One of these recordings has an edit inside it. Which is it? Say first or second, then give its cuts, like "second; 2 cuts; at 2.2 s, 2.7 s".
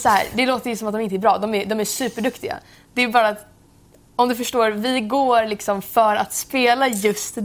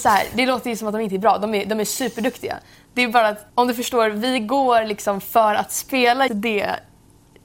second; 2 cuts; at 3.5 s, 6.3 s